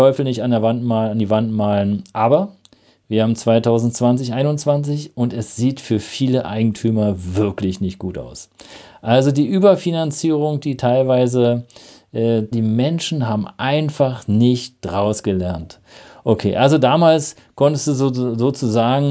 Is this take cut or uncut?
cut